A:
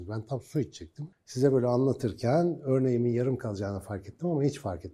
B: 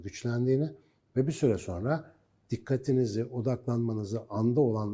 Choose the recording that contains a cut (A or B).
A